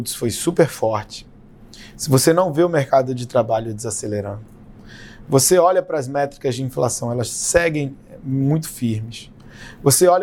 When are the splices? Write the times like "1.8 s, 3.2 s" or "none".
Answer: none